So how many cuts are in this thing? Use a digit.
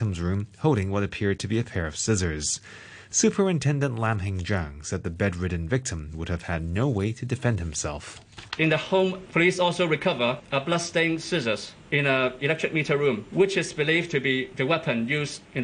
1